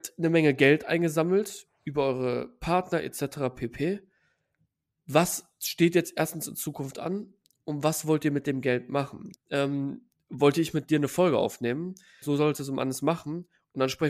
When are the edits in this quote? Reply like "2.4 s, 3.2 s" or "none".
9.3 s, 12.2 s